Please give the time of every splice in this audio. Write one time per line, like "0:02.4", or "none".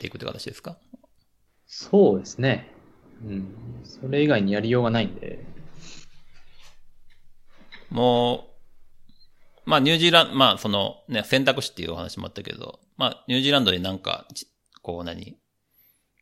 none